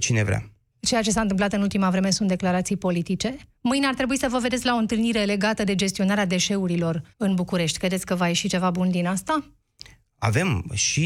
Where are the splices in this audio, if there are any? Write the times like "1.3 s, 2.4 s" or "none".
7.1 s